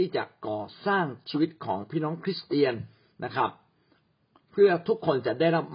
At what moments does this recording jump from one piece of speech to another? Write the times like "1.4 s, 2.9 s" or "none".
none